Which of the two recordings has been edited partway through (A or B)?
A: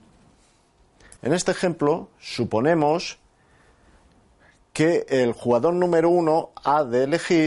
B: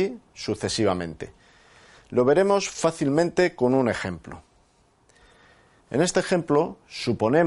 A